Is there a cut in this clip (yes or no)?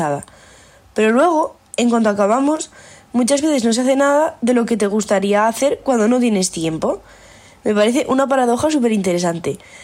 no